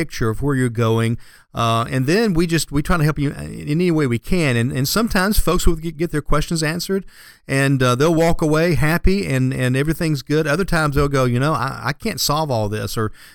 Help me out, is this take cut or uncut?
uncut